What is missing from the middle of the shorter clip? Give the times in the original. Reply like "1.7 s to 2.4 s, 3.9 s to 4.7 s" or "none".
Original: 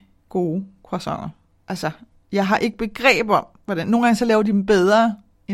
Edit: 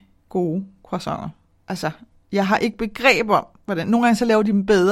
none